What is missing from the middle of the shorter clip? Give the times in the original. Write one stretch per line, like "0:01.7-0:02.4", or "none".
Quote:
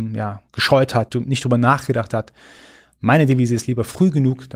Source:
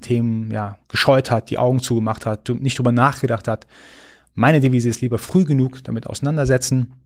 0:01.4-0:02.4